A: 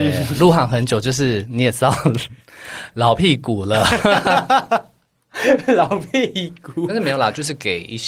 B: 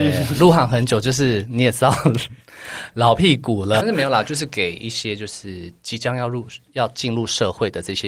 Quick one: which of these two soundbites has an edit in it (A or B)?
B